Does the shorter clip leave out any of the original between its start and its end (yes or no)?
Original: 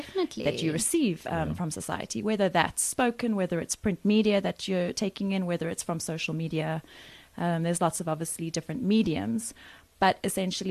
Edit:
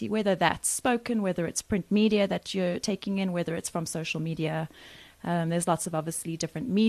no